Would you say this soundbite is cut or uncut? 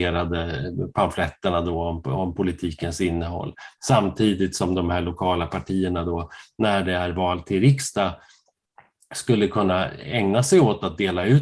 cut